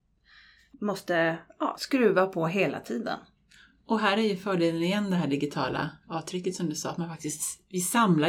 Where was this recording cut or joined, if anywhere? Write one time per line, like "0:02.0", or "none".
0:01.8